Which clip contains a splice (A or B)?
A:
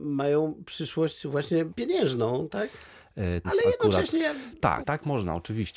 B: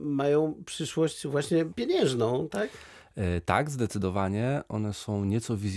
A